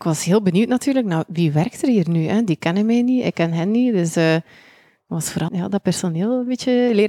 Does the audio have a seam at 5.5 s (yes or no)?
yes